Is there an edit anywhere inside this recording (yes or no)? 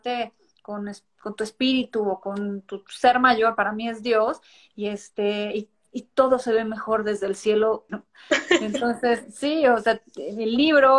yes